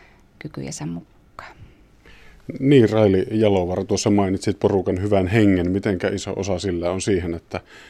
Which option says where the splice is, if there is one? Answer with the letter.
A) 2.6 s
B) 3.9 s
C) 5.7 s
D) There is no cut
D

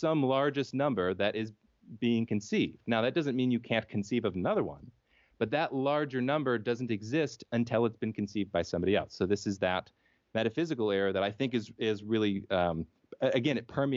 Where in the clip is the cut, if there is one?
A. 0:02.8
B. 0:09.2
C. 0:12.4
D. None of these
D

